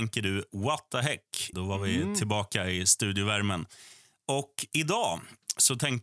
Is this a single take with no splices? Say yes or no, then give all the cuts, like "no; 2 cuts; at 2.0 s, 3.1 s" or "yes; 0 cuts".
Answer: no; 1 cut; at 1.5 s